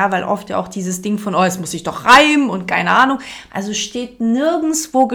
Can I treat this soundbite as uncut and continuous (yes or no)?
no